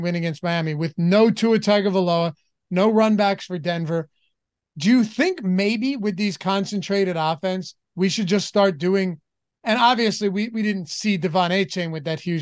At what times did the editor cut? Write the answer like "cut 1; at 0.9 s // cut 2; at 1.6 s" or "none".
none